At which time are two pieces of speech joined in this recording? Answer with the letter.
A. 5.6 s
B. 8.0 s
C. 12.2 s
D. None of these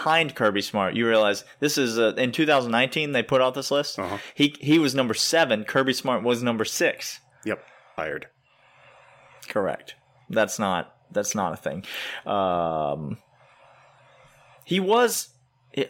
B